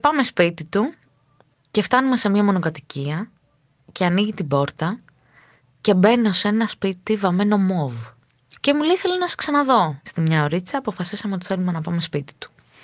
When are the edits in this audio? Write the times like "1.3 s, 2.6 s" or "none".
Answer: 8.6 s, 10.1 s